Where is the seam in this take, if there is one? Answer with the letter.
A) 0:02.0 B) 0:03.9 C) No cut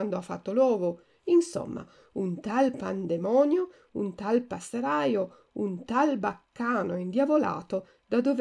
C